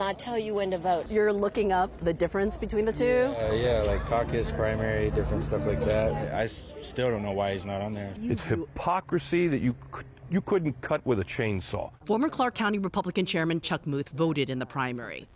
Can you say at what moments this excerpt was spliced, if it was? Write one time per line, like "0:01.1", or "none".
none